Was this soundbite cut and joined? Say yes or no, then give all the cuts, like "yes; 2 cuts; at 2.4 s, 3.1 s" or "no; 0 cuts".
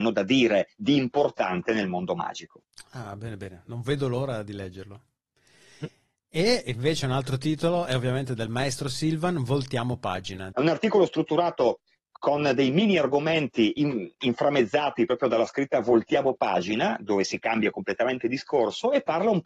yes; 1 cut; at 10.5 s